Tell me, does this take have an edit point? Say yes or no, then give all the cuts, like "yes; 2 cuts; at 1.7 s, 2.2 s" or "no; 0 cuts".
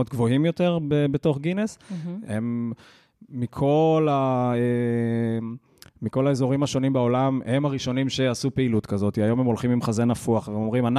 yes; 1 cut; at 2.2 s